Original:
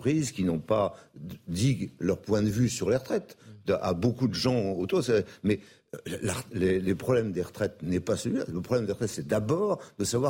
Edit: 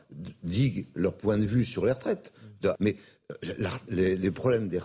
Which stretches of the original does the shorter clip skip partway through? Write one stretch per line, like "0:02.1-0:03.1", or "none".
0:03.8-0:05.4